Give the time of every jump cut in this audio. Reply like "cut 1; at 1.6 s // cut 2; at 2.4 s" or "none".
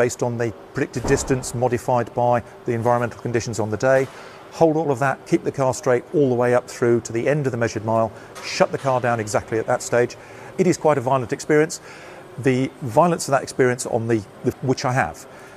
cut 1; at 10.5 s // cut 2; at 14.5 s